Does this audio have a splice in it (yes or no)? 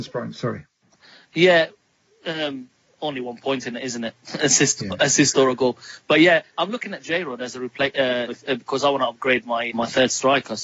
yes